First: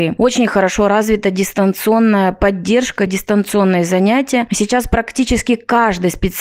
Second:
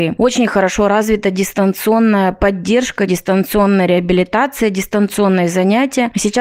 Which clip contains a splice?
first; 1 cut; at 3.1 s

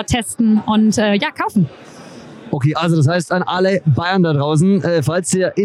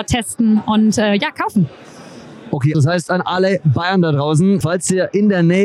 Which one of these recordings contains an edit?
second; 2 cuts; at 2.7 s, 4.6 s

